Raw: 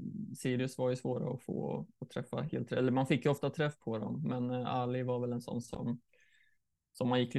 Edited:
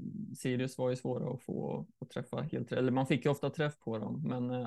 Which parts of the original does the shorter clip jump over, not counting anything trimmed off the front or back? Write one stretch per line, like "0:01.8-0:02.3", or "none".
none